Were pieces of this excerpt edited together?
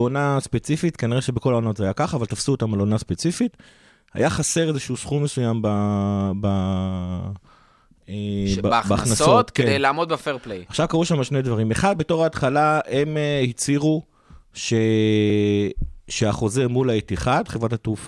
no; 0 cuts

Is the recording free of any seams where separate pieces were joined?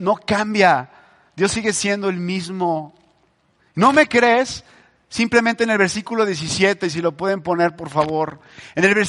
no; 1 cut; at 3.6 s

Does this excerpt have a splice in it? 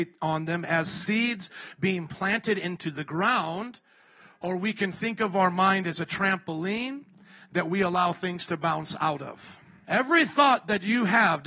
yes; 1 cut; at 9.8 s

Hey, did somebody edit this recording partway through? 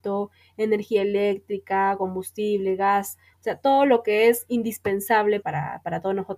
yes; 2 cuts; at 3.3 s, 5.4 s

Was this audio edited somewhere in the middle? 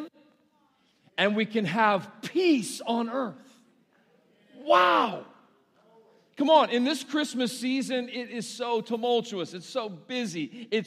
no; 0 cuts

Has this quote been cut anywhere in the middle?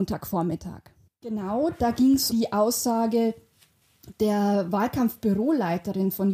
yes; 2 cuts; at 1.1 s, 2.3 s

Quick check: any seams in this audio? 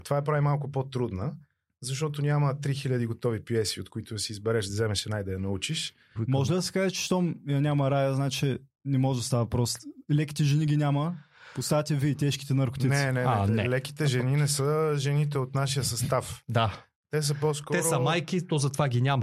yes; 1 cut; at 6.2 s

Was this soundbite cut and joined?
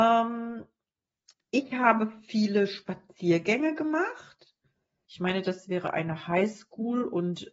yes; 1 cut; at 5.0 s

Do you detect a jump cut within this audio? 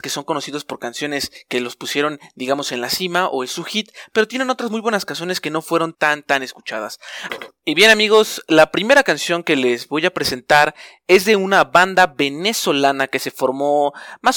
yes; 2 cuts; at 5.9 s, 7.3 s

